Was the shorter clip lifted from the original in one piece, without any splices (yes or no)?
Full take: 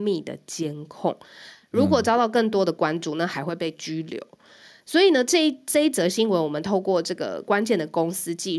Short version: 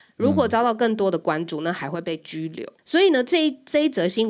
no